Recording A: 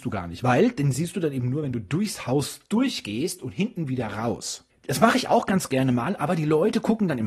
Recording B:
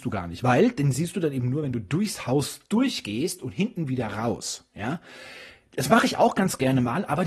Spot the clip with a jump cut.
A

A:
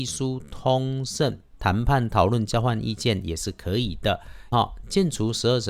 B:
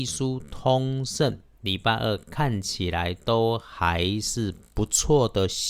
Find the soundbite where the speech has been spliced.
A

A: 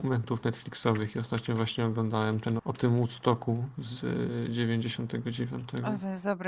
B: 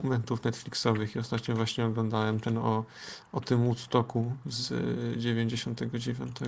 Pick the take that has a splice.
A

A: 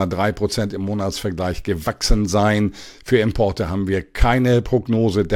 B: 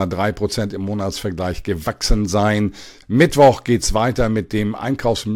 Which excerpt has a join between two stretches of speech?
B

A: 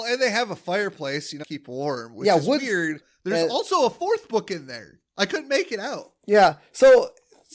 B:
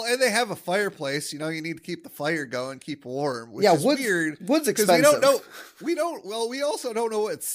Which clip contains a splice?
A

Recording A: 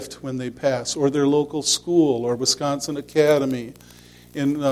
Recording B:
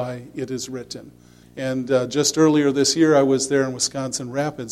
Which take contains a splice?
B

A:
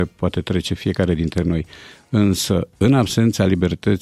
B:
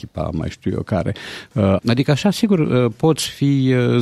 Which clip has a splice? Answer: B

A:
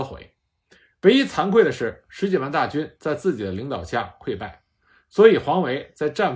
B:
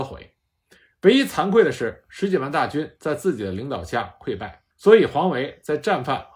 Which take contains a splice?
B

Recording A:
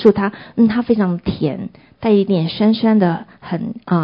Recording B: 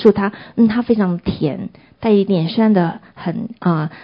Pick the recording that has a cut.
B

